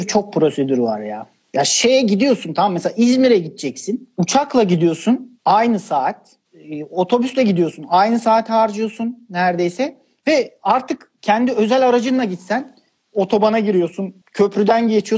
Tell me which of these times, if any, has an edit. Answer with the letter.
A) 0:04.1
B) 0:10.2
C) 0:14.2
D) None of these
C